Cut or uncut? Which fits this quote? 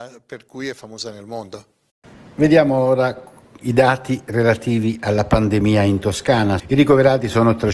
cut